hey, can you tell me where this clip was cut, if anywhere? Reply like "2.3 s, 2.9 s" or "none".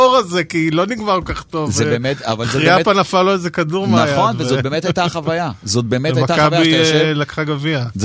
none